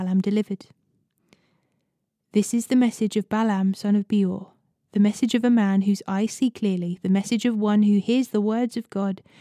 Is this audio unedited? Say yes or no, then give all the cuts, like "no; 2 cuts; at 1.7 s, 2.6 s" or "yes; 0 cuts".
yes; 0 cuts